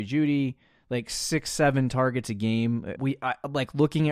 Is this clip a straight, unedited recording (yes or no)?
no